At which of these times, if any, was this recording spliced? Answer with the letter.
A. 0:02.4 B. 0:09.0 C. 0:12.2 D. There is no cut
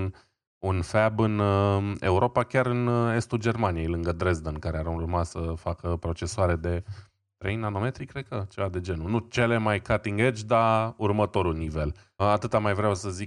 C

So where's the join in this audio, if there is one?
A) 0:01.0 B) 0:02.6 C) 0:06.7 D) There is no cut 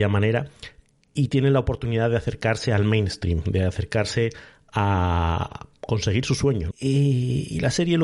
C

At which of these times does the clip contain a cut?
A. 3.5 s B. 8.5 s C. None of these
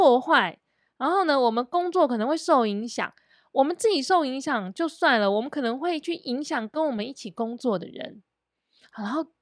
C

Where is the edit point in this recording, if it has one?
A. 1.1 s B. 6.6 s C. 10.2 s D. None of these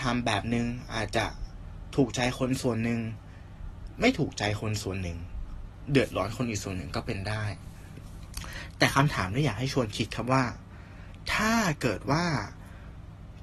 A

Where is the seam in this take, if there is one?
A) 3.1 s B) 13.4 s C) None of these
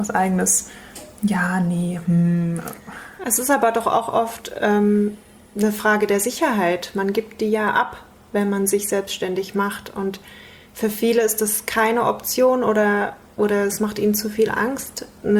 C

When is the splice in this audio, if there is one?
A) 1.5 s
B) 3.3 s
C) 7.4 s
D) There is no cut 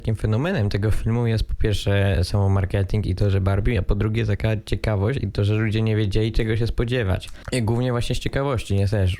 C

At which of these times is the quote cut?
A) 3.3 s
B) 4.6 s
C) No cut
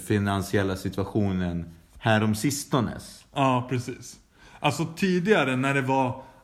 C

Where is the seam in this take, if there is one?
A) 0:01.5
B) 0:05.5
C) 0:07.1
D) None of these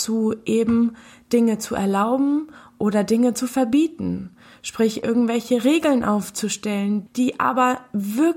C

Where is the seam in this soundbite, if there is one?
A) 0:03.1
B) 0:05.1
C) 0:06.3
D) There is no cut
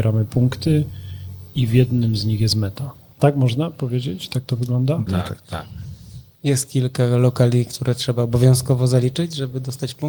B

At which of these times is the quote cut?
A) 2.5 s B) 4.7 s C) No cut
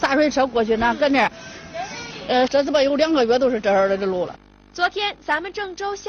A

